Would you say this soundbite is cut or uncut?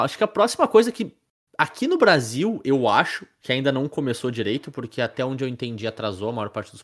uncut